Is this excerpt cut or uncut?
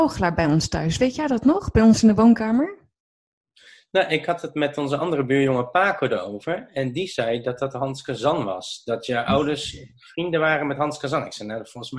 uncut